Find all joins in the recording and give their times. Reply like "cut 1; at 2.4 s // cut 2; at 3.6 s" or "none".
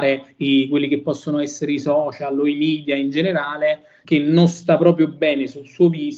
cut 1; at 4.0 s